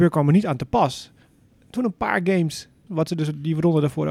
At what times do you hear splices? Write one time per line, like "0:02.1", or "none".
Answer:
0:02.9